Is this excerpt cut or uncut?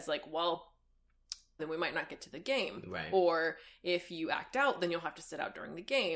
cut